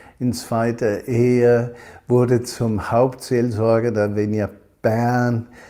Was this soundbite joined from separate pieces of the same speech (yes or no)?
no